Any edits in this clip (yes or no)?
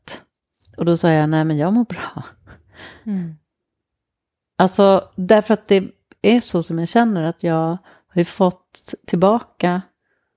no